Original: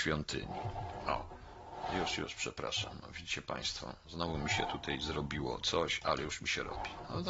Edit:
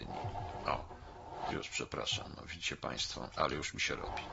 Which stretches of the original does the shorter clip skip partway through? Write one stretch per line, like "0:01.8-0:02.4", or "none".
0:01.9-0:02.2
0:04.0-0:06.0